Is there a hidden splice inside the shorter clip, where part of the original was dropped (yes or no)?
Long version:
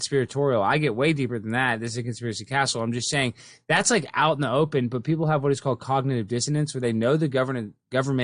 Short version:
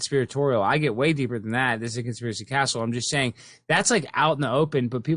no